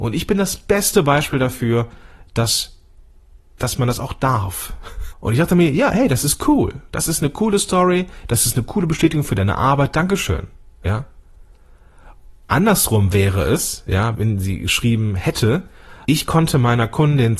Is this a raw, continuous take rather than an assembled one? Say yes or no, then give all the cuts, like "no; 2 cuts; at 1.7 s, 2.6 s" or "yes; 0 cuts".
no; 3 cuts; at 5.1 s, 14.1 s, 16.0 s